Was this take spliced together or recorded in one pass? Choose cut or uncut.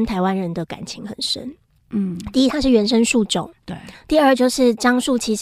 uncut